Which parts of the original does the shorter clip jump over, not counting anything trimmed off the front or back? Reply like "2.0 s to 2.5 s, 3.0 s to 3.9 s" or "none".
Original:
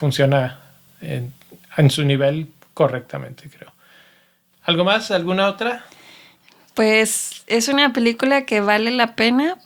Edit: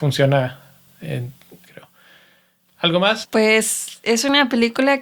1.7 s to 3.5 s, 5.1 s to 6.7 s